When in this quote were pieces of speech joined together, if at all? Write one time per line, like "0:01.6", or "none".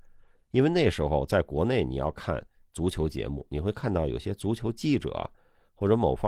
none